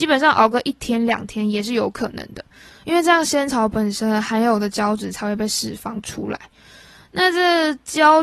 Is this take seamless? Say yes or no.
yes